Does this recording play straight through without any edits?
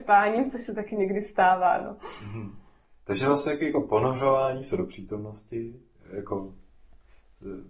yes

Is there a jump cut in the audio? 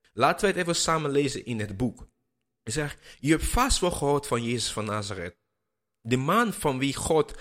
no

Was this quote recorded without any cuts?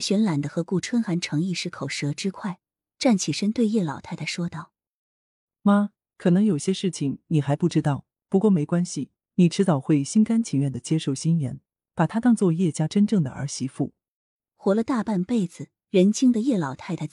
yes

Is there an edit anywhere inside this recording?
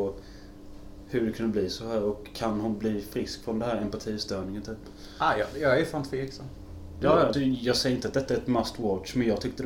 yes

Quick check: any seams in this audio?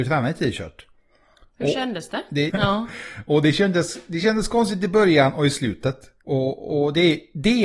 yes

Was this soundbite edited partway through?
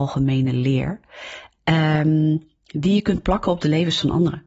no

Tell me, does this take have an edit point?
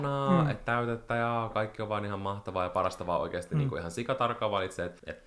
no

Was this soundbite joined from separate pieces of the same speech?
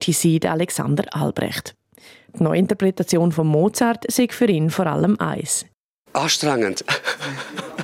no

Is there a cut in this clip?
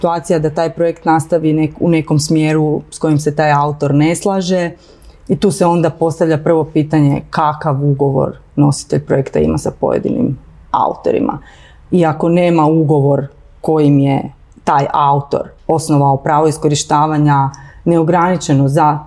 yes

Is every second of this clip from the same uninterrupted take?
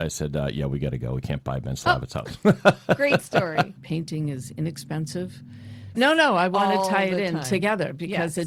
no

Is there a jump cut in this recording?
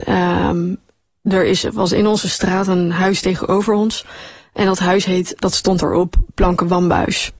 yes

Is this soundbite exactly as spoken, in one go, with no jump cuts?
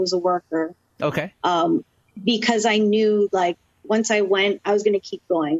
yes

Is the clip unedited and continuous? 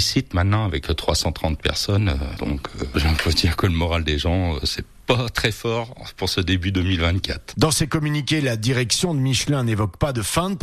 no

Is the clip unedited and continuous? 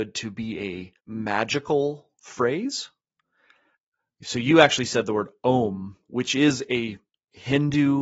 yes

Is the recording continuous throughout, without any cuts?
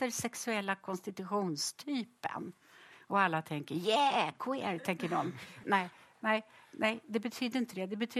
no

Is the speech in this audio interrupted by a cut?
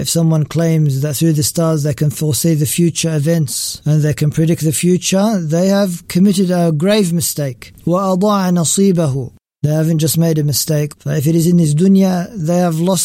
yes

